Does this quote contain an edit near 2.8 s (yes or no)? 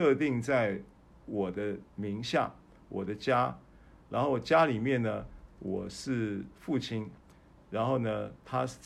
no